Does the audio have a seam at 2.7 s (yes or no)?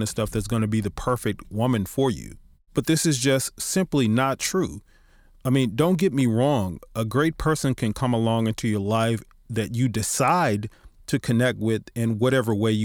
yes